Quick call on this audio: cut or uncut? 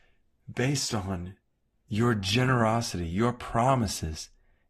uncut